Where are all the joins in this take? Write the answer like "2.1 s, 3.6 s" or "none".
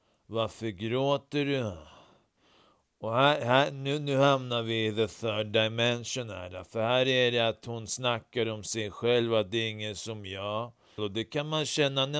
11.0 s

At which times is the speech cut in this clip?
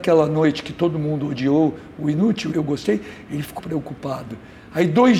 2.5 s, 3.6 s

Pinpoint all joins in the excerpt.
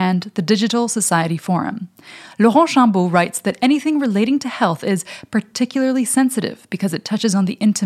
none

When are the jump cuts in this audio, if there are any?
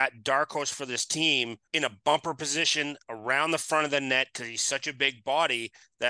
1.7 s

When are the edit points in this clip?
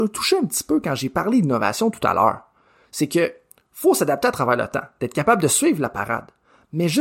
none

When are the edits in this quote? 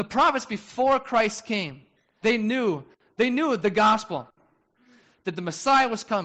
2.2 s

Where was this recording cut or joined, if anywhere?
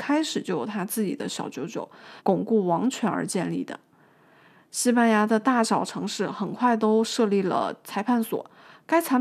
2.2 s

